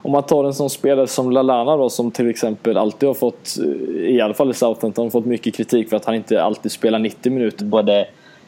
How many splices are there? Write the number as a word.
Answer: one